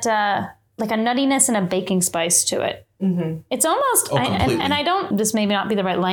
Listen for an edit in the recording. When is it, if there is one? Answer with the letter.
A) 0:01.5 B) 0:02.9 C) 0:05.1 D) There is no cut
C